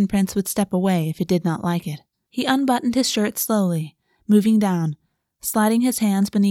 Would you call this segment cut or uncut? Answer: cut